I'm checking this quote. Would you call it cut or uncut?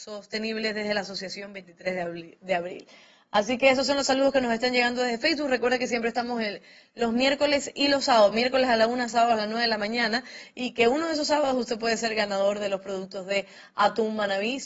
uncut